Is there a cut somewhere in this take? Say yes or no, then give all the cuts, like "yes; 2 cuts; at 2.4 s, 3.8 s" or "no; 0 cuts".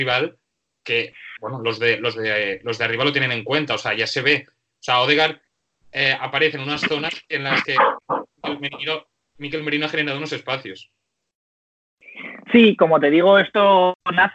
no; 0 cuts